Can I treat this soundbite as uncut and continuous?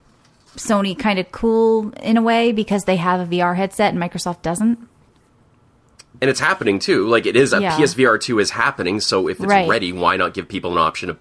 yes; 0 cuts

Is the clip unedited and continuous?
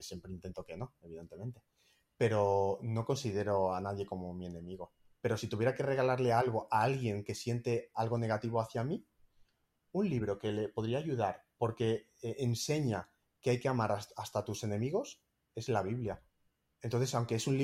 yes; 0 cuts

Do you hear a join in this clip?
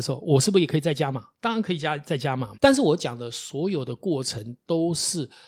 yes; 1 cut; at 2.5 s

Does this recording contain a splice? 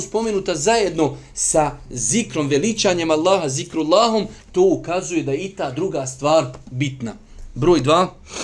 no; 0 cuts

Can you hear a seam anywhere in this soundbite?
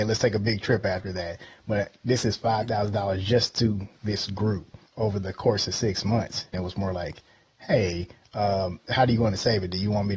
yes; 2 cuts; at 4.9 s, 6.5 s

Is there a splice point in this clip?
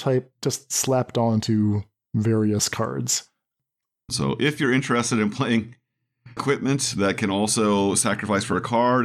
yes; 2 cuts; at 4.1 s, 6.4 s

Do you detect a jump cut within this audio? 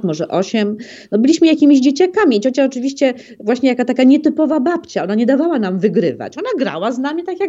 no; 0 cuts

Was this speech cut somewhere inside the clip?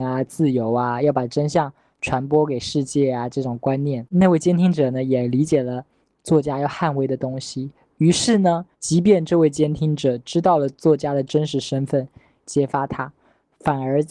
yes; 2 cuts; at 8.7 s, 12.4 s

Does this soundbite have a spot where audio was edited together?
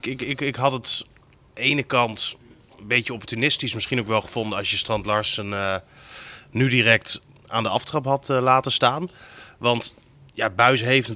no; 0 cuts

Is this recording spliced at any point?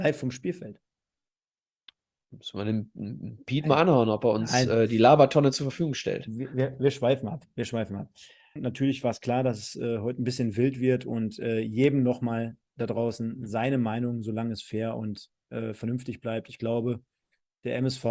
yes; 1 cut; at 8.6 s

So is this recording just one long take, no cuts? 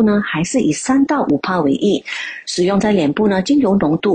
no; 1 cut; at 2.4 s

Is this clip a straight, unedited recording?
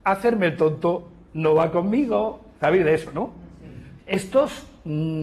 no; 1 cut; at 4.0 s

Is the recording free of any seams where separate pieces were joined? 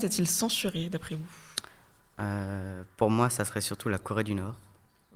yes; 0 cuts

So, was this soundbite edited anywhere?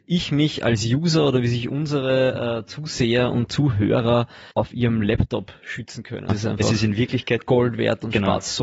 yes; 2 cuts; at 4.5 s, 6.3 s

